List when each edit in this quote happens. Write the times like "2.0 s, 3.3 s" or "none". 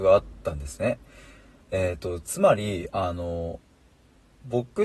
none